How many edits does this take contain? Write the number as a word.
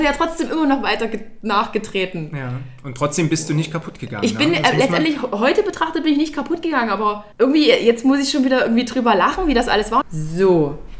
two